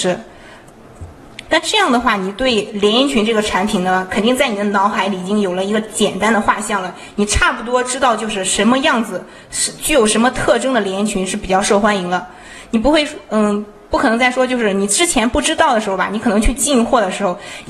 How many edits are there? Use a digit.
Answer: 1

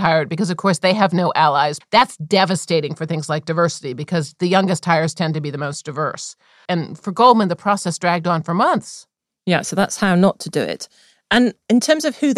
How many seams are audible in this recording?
2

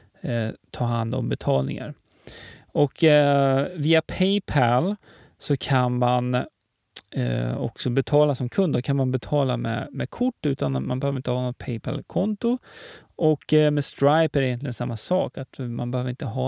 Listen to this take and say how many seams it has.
0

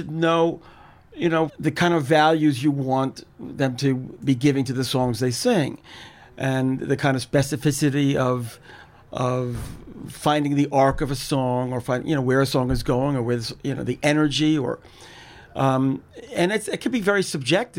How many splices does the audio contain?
1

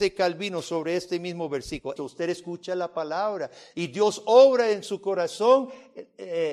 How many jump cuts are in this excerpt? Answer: 1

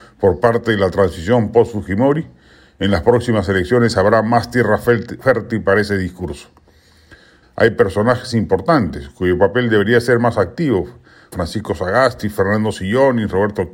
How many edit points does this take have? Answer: 2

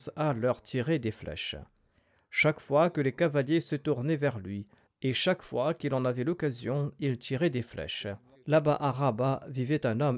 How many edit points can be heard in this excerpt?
2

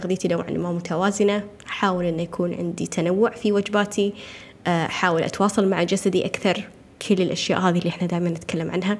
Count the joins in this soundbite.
0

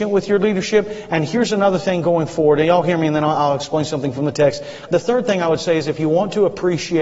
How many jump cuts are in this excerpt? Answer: 2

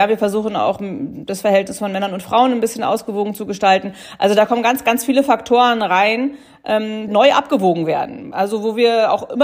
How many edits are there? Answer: 1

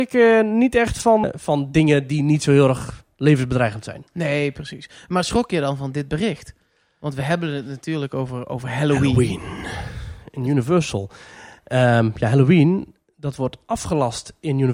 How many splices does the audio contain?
1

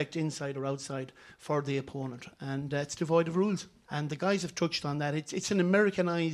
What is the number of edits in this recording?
1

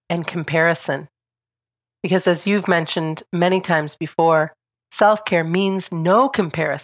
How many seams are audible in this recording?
0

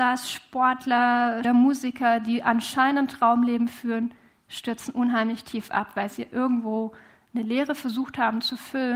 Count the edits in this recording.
1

